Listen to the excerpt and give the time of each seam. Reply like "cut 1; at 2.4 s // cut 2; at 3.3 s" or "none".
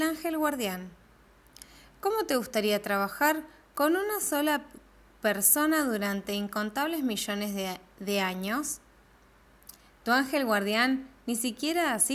none